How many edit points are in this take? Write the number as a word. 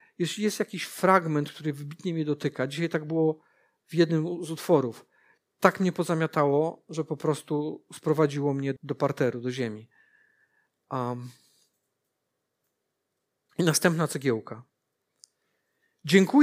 two